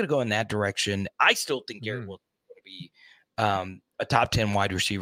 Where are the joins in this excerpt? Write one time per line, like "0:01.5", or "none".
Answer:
0:01.1

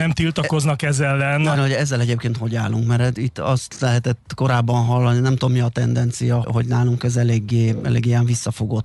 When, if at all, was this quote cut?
0:01.5
0:06.4

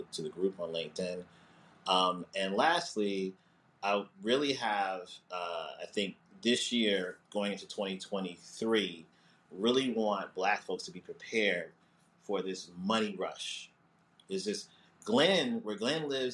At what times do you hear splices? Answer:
none

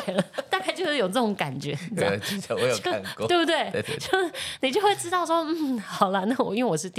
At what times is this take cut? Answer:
none

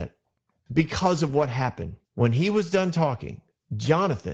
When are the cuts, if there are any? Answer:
0:02.1

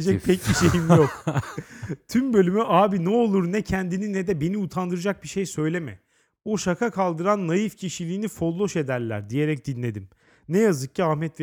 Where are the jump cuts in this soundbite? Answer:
0:06.4

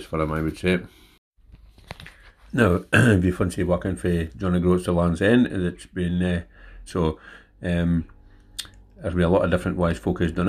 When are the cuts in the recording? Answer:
0:06.9

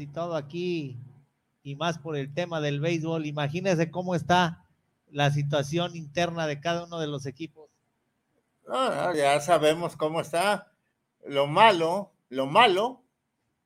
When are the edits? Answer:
0:09.1

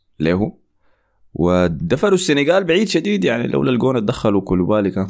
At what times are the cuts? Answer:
none

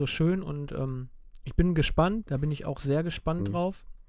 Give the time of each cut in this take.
0:02.2

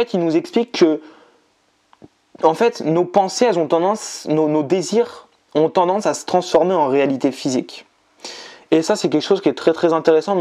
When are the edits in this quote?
none

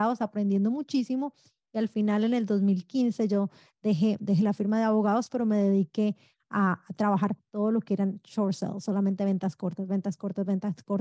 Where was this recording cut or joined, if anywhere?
none

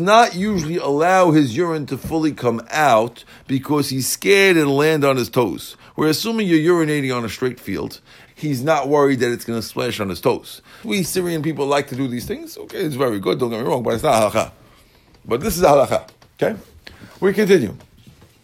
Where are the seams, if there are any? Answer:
0:08.3
0:10.8

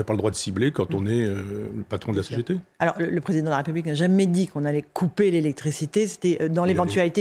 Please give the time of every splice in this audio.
none

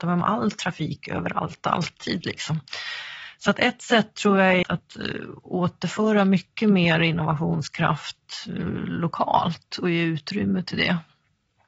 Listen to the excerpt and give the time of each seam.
0:04.6

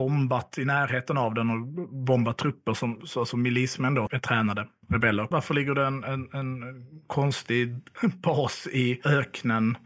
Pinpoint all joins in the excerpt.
0:04.1
0:05.3

